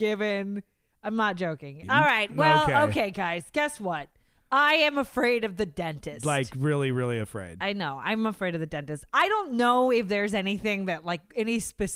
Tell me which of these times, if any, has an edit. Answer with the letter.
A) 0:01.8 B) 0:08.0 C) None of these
A